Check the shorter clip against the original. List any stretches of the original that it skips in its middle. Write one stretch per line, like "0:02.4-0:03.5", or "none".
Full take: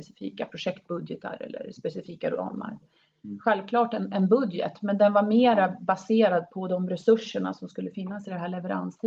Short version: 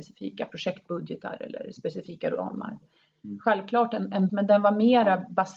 0:04.3-0:04.8